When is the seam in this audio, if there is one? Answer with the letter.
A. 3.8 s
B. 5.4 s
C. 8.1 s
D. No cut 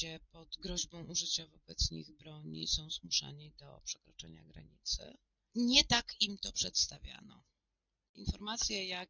D